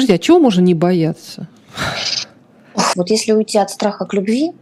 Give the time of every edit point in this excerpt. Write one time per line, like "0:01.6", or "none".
0:02.9